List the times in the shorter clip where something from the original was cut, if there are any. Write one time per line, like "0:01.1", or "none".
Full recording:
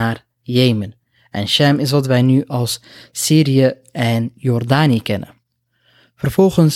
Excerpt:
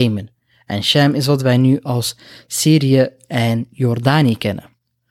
none